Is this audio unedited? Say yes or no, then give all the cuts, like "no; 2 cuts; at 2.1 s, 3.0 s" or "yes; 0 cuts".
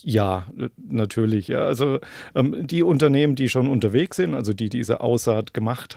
yes; 0 cuts